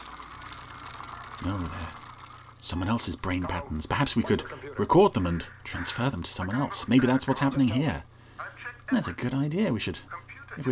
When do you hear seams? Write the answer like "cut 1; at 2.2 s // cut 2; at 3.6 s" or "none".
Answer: cut 1; at 2.5 s

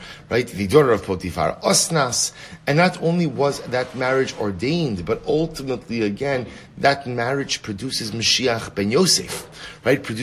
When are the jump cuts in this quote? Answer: none

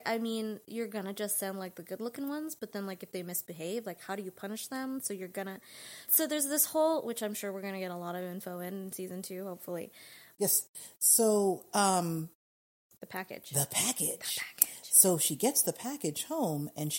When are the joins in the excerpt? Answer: cut 1; at 6.1 s // cut 2; at 10.4 s

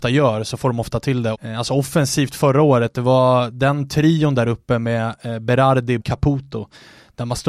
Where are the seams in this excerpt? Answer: cut 1; at 1.3 s // cut 2; at 6.0 s

